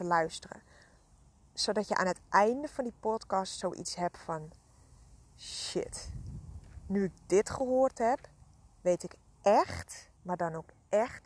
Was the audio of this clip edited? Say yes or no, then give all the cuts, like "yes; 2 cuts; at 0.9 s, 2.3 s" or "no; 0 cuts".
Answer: yes; 1 cut; at 10.2 s